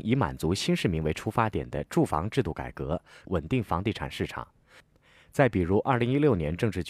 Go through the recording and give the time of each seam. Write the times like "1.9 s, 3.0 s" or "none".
3.2 s